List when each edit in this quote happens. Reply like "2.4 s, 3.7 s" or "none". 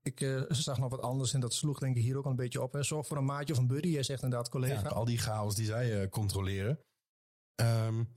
4.9 s